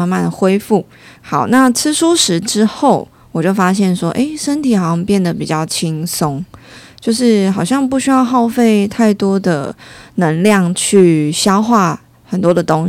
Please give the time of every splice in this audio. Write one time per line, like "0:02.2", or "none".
0:01.2